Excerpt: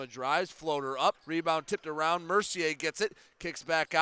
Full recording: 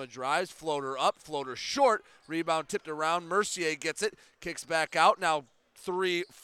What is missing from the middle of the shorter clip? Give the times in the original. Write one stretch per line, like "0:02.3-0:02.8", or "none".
0:01.1-0:02.2